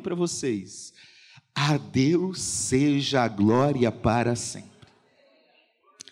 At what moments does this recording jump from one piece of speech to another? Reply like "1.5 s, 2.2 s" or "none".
none